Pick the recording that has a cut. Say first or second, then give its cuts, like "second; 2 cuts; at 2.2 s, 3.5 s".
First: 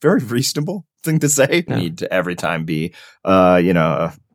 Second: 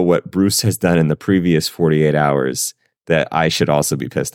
first; 1 cut; at 1.7 s